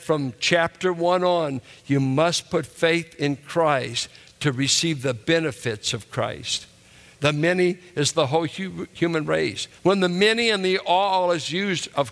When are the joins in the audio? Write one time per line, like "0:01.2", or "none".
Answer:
0:07.2
0:09.8